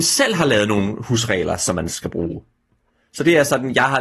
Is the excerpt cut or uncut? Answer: uncut